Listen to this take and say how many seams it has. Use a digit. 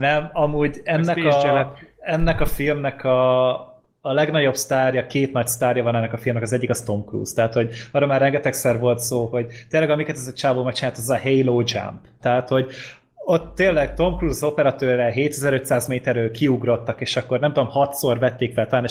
1